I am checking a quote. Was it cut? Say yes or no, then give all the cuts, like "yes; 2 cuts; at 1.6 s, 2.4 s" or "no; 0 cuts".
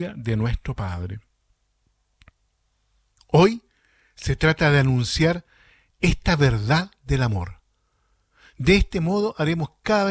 no; 0 cuts